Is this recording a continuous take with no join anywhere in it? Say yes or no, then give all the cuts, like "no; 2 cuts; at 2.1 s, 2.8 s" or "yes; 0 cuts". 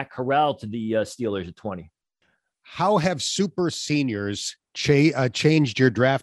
yes; 0 cuts